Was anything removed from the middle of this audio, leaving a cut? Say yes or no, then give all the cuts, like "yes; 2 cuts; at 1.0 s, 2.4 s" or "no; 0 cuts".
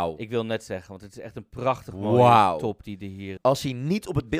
yes; 1 cut; at 3.4 s